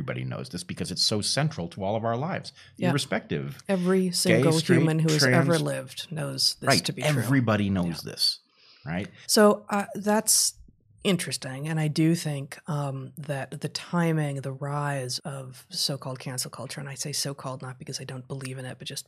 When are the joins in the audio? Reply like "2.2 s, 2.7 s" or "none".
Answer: 9.2 s, 15.2 s